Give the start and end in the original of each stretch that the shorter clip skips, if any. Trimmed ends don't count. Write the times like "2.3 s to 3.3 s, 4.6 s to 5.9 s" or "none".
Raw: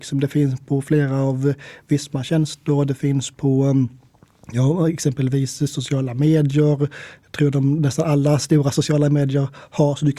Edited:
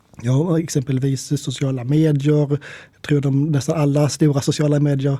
none

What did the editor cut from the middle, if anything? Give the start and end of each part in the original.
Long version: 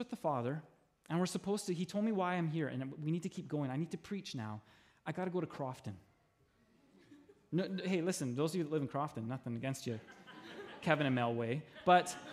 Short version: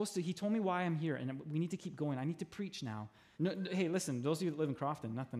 4.9 s to 7.5 s

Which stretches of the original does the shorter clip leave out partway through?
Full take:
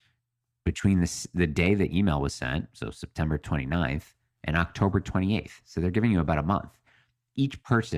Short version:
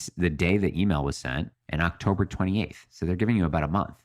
2.7 s to 4.3 s

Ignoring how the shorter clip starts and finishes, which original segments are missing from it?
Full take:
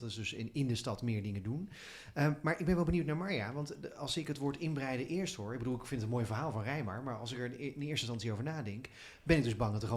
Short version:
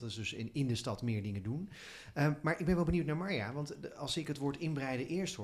none

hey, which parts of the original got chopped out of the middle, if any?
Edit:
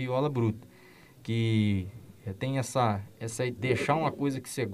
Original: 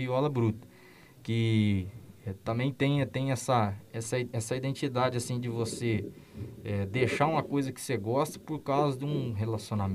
2.4 s to 3.1 s, 4.3 s to 6.9 s

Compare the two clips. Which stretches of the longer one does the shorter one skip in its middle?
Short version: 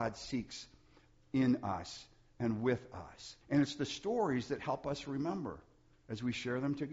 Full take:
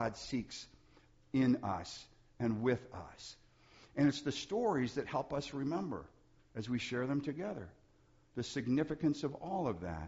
3.4 s to 3.9 s

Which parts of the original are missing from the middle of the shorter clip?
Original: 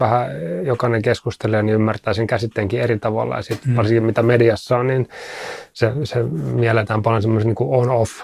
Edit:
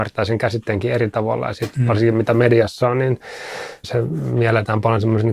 5.7 s to 6.1 s

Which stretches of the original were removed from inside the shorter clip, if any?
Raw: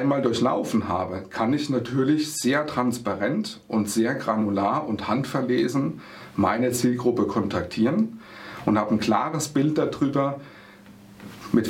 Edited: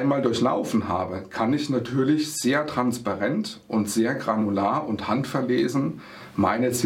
none

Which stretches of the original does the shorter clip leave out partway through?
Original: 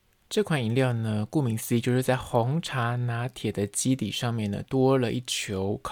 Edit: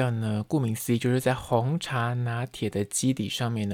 none

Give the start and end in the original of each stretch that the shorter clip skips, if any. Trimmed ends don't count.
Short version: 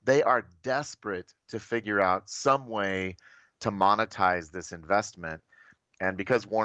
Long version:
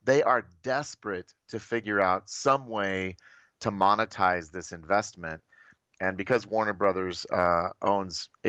none

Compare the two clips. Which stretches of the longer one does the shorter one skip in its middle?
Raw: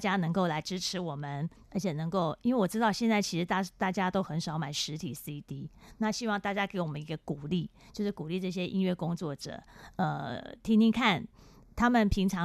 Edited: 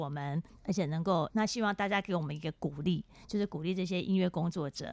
2.4 s to 5.9 s

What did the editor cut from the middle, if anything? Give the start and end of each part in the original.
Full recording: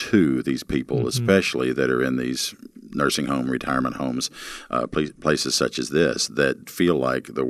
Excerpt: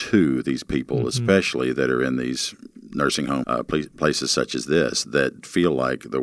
3.4 s to 4.7 s

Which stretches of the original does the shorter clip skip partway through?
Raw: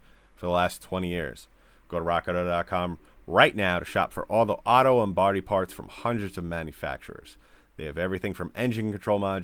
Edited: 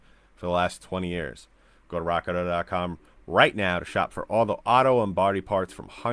none

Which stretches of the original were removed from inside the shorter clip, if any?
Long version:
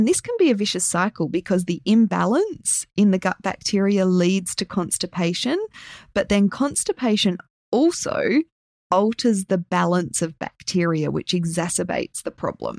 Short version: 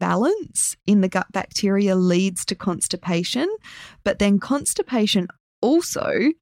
none

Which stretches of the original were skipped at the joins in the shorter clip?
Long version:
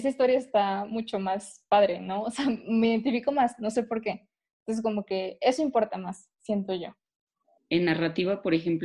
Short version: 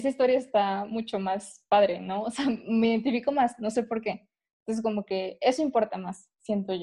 none

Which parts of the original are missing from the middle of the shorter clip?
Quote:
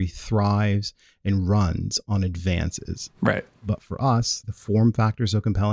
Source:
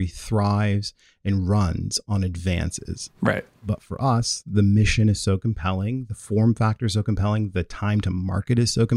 4.4 s to 6.1 s

